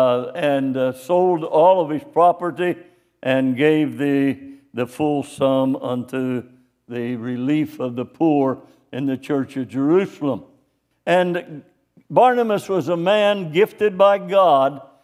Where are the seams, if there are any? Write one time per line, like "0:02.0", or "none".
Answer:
0:10.9